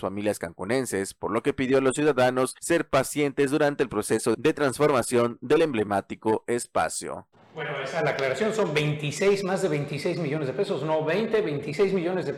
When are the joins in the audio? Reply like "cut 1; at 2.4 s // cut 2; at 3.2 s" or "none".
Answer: cut 1; at 7.3 s